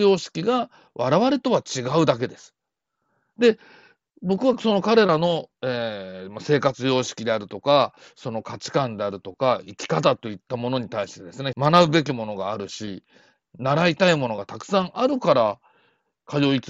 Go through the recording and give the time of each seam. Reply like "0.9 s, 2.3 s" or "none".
11.5 s